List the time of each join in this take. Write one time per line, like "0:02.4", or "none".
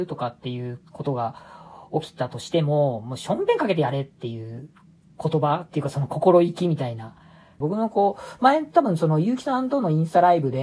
0:07.6